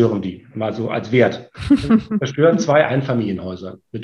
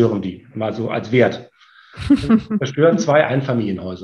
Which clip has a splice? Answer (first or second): first